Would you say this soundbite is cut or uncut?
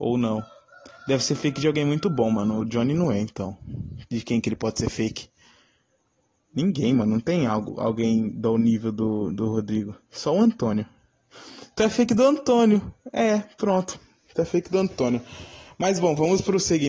uncut